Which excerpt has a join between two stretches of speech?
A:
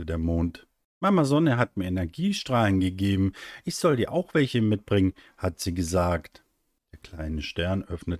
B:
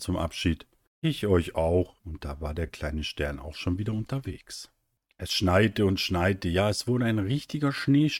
B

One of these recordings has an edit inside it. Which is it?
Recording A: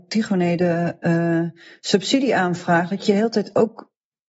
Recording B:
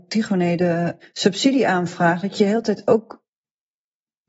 B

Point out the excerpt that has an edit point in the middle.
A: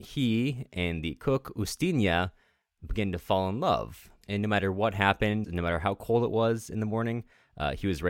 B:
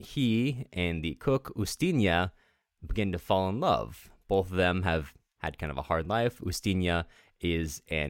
A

